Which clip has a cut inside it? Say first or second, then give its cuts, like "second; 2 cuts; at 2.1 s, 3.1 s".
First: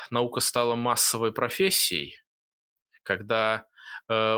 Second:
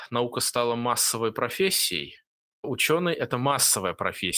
second; 1 cut; at 2.6 s